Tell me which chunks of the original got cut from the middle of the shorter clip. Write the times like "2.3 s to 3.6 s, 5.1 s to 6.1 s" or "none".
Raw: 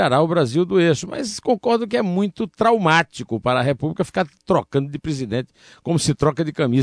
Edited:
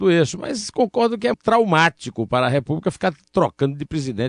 2.0 s to 2.5 s